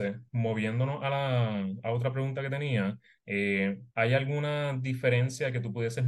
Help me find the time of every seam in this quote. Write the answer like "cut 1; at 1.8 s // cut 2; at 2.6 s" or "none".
cut 1; at 3.9 s